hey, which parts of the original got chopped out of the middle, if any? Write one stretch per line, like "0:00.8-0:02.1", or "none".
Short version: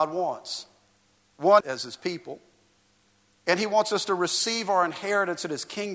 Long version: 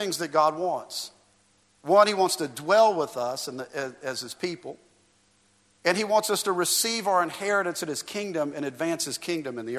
0:02.1-0:04.0